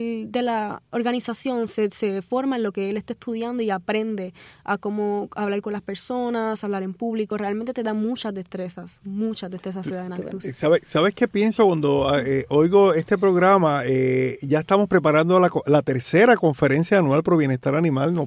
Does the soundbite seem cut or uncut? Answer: uncut